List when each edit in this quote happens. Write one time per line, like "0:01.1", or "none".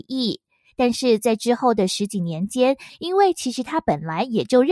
0:02.9